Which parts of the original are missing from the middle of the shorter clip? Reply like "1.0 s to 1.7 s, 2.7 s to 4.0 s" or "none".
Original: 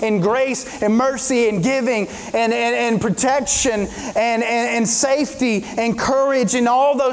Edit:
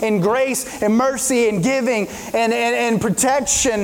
none

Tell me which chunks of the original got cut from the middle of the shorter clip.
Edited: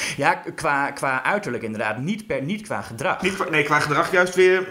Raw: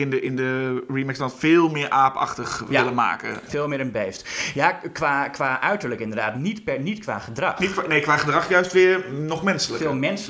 none

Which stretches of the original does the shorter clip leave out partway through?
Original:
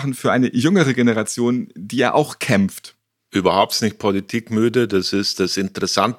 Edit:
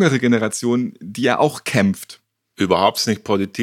none

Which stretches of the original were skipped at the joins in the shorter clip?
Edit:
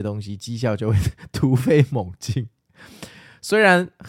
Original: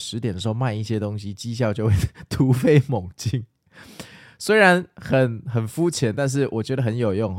none

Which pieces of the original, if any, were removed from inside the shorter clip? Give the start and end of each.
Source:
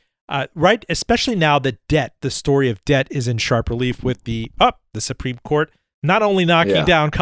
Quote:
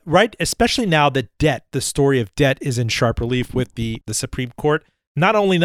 4.5 s to 4.9 s

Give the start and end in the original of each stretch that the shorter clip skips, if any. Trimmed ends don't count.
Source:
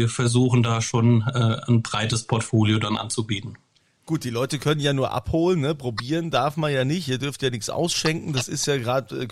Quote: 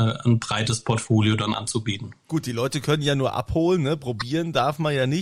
3.6 s to 4.0 s

